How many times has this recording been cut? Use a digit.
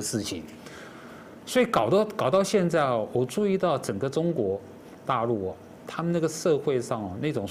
0